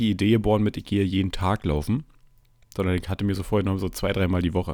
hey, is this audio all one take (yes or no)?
no